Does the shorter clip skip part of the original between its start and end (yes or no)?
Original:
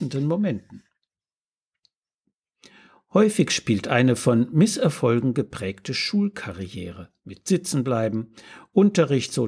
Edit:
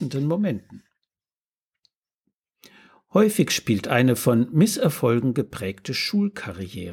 no